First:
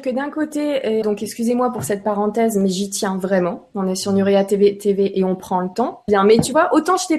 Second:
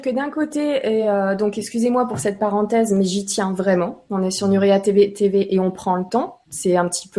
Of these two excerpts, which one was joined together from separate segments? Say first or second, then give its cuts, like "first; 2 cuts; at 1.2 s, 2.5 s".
first; 2 cuts; at 1.0 s, 6.1 s